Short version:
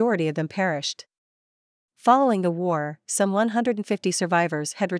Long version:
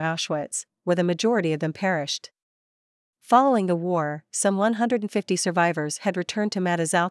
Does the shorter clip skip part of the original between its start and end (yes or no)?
no